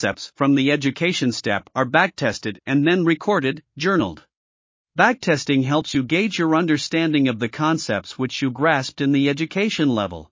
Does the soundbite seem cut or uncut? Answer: cut